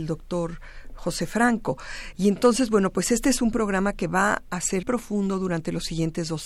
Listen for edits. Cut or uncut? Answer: cut